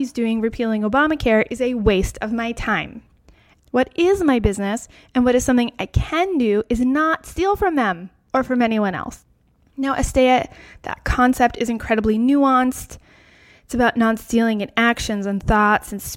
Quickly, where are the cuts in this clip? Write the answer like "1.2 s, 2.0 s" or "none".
3.6 s